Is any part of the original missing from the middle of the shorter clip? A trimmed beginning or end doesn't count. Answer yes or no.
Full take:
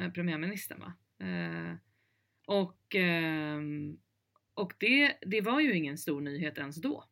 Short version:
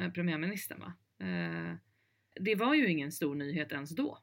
yes